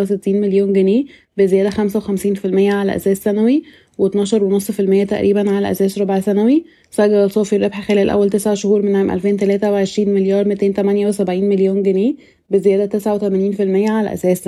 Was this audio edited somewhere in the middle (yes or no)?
no